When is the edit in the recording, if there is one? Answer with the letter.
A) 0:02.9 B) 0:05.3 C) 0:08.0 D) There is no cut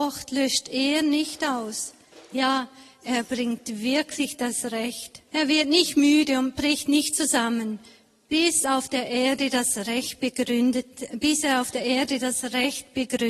B